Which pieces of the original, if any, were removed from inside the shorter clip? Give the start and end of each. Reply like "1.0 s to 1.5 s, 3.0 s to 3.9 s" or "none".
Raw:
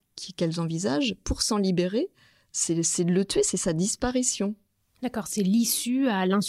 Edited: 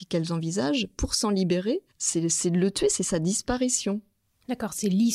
2.2 s to 2.4 s